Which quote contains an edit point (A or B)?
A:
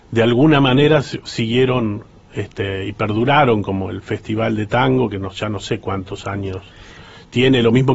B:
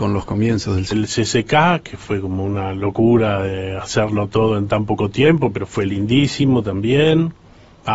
B